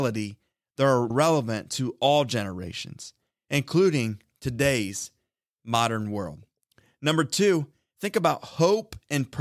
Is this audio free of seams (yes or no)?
no